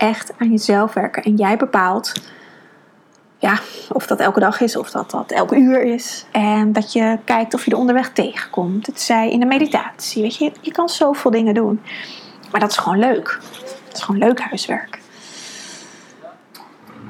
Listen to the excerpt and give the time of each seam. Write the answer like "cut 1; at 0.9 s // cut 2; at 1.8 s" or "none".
cut 1; at 4.7 s // cut 2; at 6.3 s